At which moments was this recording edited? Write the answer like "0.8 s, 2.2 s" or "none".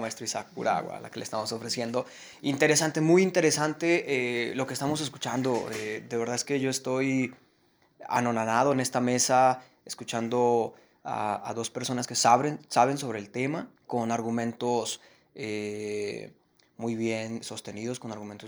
13.8 s, 17.4 s

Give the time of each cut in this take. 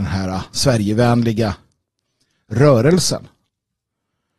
none

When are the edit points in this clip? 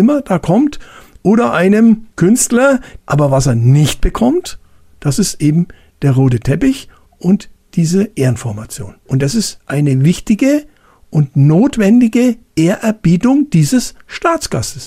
3.0 s

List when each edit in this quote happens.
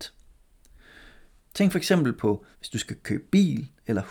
1.4 s, 2.5 s

